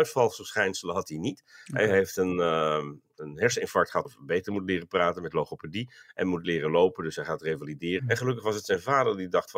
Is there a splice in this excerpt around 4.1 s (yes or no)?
yes